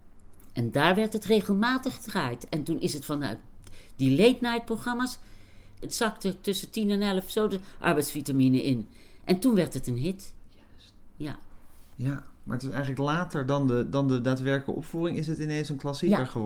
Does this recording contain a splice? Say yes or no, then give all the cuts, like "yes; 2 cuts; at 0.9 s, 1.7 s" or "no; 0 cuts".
yes; 1 cut; at 5.8 s